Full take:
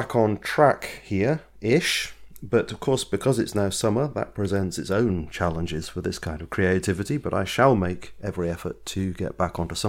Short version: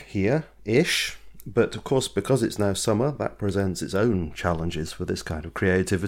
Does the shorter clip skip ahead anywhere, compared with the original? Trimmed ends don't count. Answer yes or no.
no